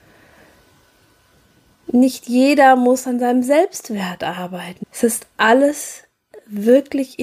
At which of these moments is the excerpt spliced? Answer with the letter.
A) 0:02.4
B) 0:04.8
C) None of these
B